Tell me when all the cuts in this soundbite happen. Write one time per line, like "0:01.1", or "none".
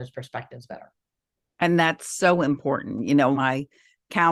0:03.3